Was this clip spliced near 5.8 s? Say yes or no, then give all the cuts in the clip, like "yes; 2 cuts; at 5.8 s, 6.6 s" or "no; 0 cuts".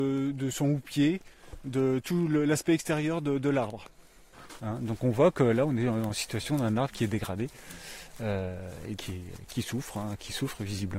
no; 2 cuts; at 4.6 s, 9.0 s